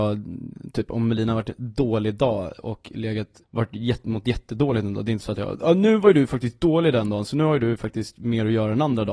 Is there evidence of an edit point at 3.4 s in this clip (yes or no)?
yes